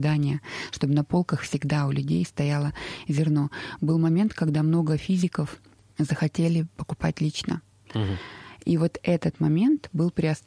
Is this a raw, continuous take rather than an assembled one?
yes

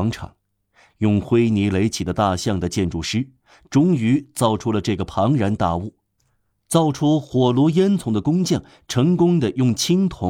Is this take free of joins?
yes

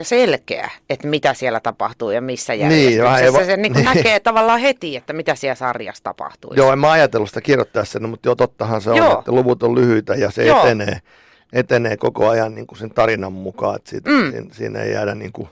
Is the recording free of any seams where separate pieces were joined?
yes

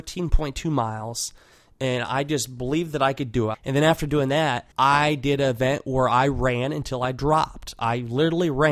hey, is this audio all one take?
no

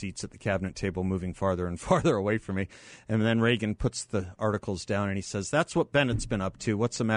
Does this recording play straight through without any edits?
yes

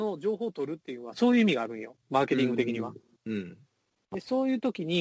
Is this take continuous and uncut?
no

